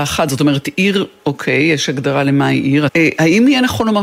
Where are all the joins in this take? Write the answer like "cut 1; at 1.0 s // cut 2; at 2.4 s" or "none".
cut 1; at 2.9 s